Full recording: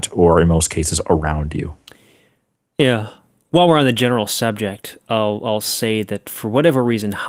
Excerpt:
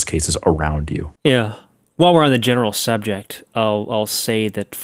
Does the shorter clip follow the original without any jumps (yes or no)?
no